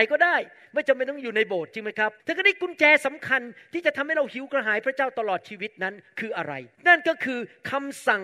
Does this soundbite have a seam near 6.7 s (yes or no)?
yes